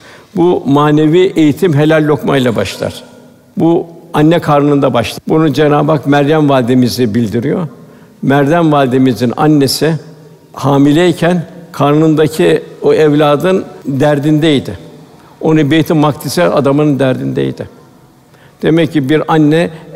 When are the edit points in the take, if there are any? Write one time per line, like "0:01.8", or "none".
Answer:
none